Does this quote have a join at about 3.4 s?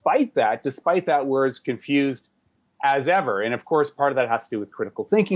no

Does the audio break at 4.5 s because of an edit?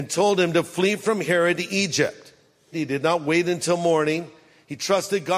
no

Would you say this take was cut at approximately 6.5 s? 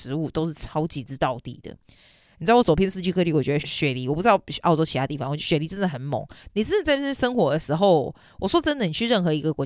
yes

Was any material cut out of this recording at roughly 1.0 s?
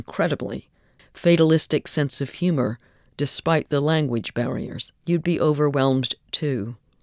yes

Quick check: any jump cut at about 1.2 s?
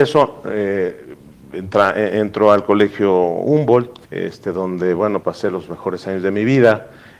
no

